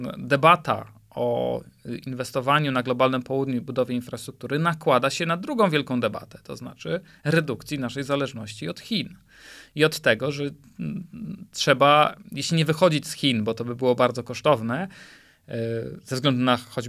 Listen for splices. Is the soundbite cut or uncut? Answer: uncut